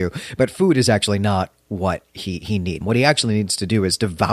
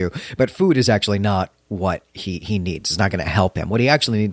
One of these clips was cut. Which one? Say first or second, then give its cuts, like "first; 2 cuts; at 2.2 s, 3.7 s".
first; 1 cut; at 2.8 s